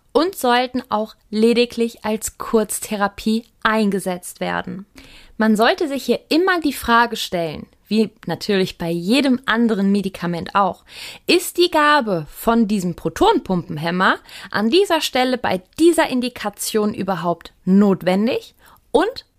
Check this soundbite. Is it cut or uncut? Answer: uncut